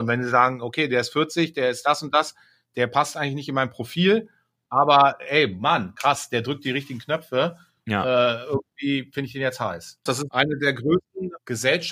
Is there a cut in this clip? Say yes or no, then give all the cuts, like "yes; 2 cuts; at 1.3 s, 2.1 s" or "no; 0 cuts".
yes; 1 cut; at 10.1 s